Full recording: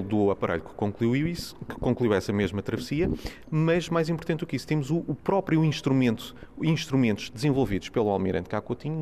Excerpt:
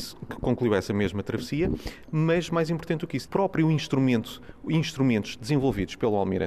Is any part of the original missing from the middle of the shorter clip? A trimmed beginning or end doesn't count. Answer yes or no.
yes